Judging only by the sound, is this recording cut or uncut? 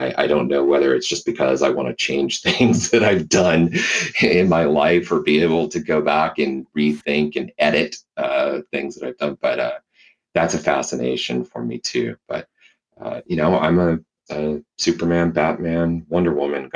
uncut